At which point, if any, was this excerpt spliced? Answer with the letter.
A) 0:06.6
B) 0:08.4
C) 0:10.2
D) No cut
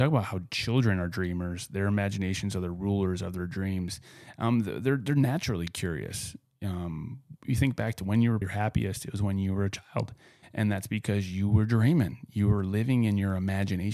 B